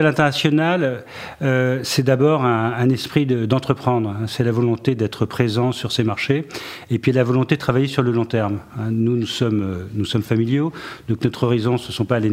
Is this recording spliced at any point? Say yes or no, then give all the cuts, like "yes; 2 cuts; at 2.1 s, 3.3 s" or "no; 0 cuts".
no; 0 cuts